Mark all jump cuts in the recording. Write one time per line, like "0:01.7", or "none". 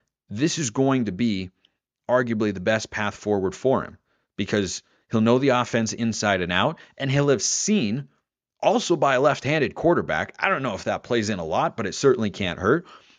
none